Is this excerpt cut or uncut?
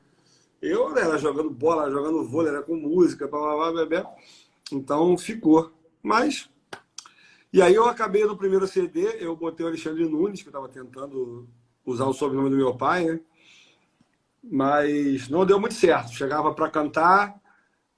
uncut